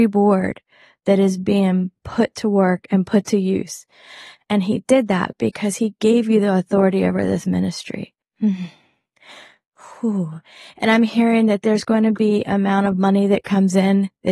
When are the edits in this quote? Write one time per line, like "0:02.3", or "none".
none